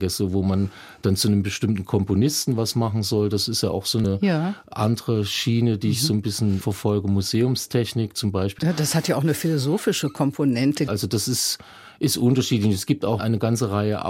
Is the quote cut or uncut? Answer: cut